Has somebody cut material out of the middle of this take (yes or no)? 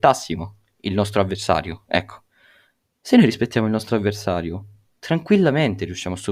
no